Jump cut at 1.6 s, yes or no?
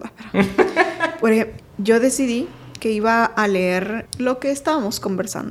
yes